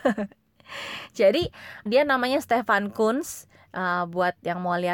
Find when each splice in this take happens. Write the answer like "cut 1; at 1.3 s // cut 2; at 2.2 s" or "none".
cut 1; at 1.9 s